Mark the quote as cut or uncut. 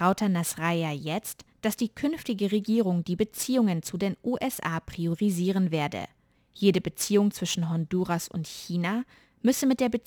cut